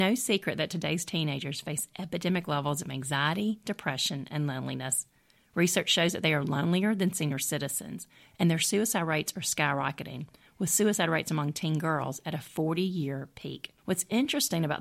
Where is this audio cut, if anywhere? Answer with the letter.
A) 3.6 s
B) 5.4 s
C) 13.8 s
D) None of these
C